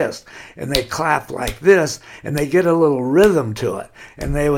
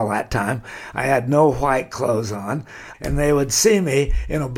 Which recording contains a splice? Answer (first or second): second